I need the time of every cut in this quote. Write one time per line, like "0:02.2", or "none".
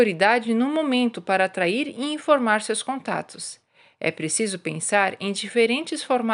none